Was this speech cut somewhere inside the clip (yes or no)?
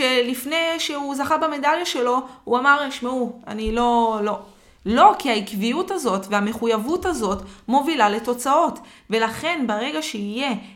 no